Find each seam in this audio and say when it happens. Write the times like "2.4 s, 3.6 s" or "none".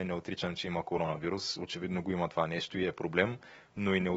none